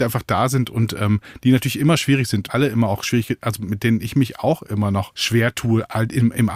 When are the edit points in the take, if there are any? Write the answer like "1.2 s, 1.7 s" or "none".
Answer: 2.5 s